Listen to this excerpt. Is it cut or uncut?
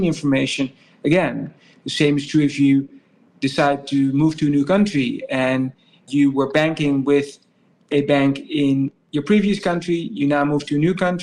uncut